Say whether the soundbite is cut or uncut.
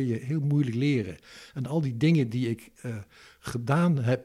uncut